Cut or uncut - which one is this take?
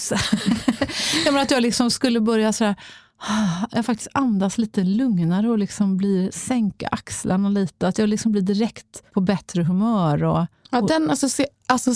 cut